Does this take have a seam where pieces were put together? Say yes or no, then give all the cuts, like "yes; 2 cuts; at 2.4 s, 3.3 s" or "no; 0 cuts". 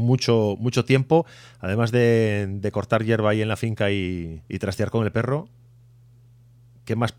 yes; 1 cut; at 4.4 s